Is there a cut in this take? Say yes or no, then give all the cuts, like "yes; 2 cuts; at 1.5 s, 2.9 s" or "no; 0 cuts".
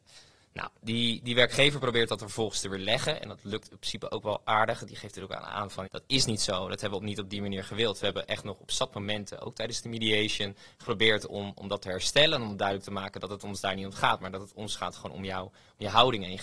yes; 1 cut; at 5.8 s